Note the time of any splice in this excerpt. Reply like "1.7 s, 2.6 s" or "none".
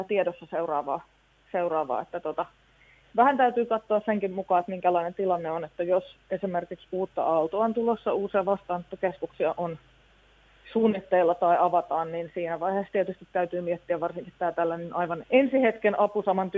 15.2 s